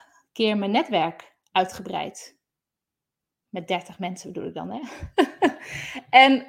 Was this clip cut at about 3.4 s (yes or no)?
no